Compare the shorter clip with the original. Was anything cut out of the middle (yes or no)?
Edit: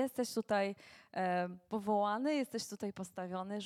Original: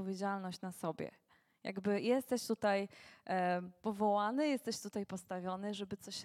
no